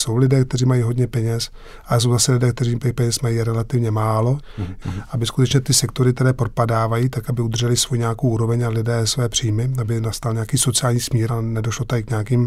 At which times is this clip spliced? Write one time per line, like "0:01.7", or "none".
0:04.8